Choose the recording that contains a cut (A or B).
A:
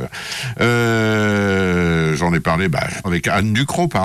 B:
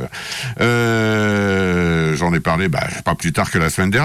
A